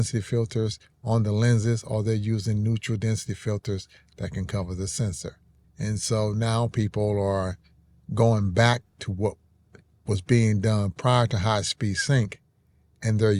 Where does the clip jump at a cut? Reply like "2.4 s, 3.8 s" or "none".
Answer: 5.6 s

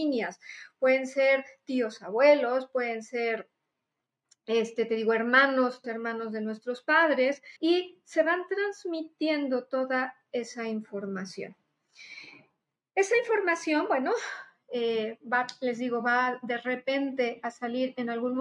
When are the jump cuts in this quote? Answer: 5.8 s, 7.6 s

